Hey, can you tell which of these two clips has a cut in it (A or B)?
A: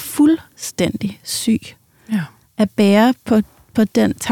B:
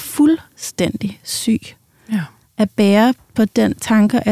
B